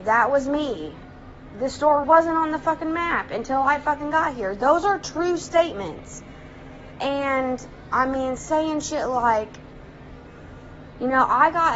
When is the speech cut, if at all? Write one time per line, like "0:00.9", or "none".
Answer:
0:02.0
0:07.0